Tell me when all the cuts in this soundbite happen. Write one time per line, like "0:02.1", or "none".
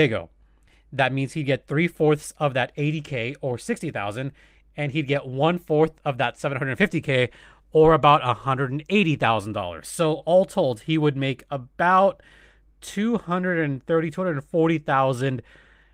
none